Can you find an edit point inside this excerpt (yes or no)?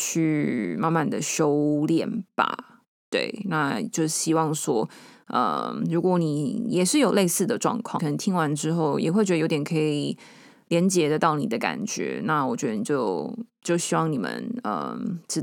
yes